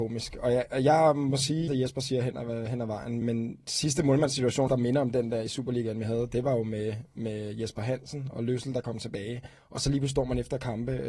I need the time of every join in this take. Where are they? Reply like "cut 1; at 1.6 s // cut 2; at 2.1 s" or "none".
cut 1; at 1.7 s // cut 2; at 3.2 s // cut 3; at 4.7 s